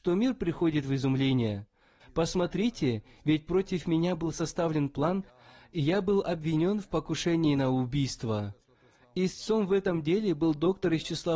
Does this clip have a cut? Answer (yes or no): yes